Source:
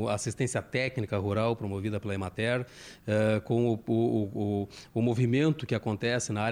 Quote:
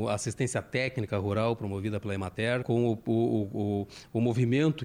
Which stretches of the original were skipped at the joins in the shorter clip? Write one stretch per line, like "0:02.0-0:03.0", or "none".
0:02.6-0:03.4